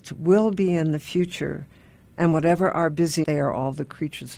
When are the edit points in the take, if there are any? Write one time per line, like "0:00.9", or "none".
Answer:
0:03.2